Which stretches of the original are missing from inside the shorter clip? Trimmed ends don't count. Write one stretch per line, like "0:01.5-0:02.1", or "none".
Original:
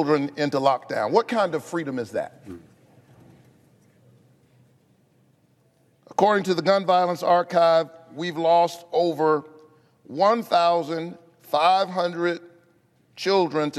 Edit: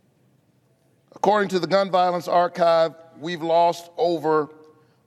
none